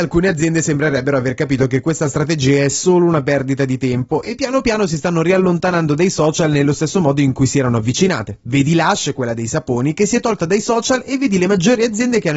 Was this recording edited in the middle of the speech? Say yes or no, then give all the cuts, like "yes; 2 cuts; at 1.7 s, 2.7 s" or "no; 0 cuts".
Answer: no; 0 cuts